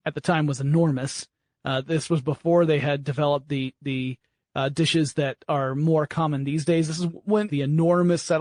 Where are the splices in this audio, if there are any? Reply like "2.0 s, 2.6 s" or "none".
7.5 s